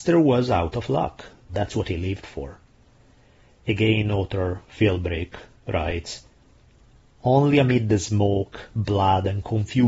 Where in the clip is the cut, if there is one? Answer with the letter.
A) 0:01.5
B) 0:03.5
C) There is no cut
A